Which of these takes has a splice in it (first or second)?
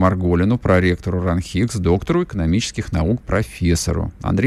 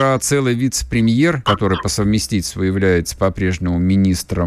second